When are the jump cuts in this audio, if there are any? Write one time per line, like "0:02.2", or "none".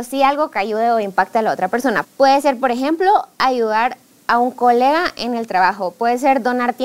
0:02.0